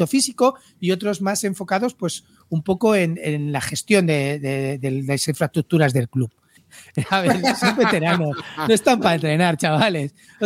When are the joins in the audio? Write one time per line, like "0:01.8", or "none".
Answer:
0:06.6